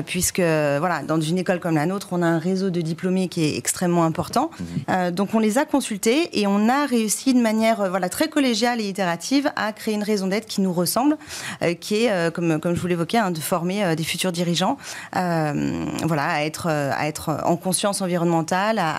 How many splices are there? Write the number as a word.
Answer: one